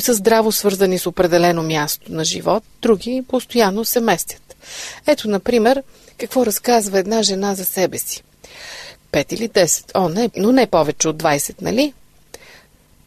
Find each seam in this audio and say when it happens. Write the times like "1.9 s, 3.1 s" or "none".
9.0 s, 10.3 s